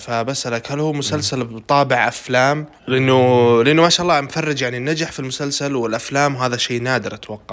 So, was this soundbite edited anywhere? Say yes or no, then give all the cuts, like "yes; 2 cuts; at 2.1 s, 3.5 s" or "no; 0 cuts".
yes; 1 cut; at 2.8 s